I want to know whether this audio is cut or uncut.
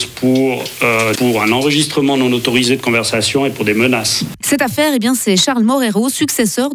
cut